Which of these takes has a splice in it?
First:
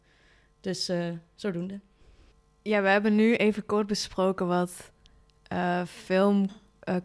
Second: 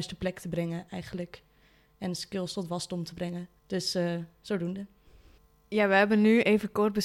second; 1 cut; at 3.6 s

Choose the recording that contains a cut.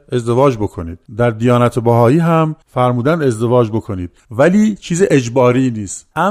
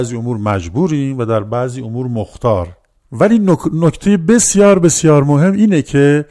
first; 3 cuts; at 1.1 s, 2.6 s, 4.2 s

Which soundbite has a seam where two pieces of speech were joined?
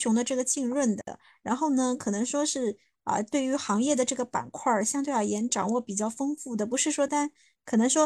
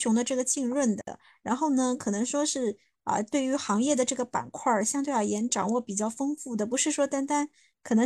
first; 1 cut; at 7.1 s

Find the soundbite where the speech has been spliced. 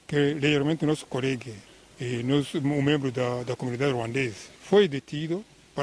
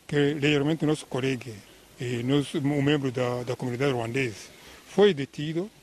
first; 1 cut; at 4.5 s

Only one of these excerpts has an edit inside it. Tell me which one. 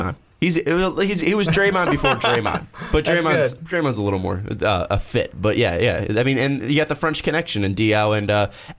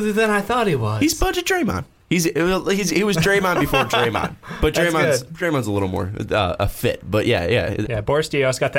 second; 1 cut; at 7.8 s

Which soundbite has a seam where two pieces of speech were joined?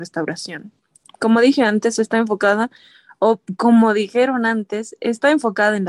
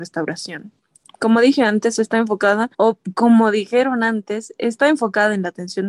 second; 1 cut; at 2.7 s

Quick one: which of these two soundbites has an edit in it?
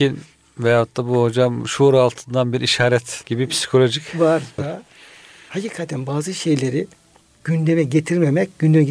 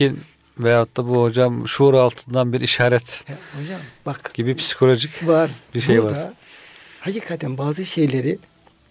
first; 2 cuts; at 3.2 s, 4.6 s

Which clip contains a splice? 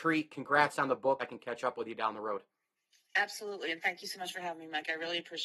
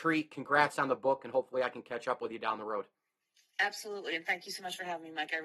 first; 1 cut; at 1.2 s

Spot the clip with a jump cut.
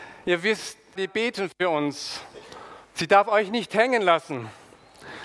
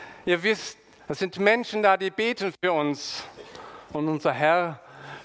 first; 2 cuts; at 1.0 s, 2.8 s

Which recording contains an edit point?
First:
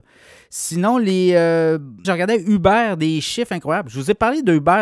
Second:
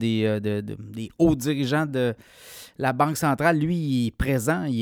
first; 1 cut; at 2.0 s

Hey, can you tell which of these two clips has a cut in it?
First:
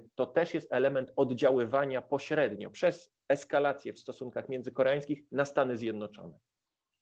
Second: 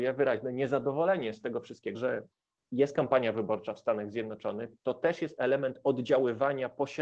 second; 1 cut; at 1.9 s

